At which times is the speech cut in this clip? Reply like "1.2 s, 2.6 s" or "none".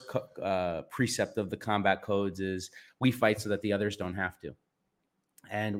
none